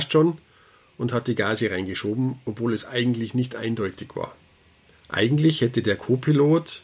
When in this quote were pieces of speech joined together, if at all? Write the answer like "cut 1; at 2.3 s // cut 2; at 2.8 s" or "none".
cut 1; at 4.9 s